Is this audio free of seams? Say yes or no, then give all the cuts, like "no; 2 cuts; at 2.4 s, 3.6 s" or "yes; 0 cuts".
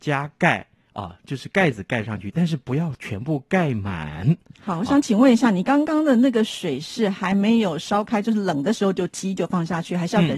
no; 1 cut; at 4.5 s